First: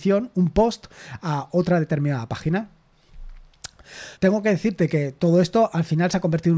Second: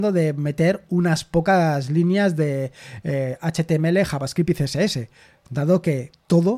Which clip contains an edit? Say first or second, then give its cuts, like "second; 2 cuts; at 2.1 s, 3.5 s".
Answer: first; 1 cut; at 4.2 s